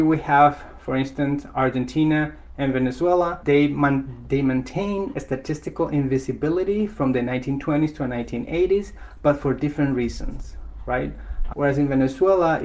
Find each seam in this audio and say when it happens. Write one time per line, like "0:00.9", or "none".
0:11.5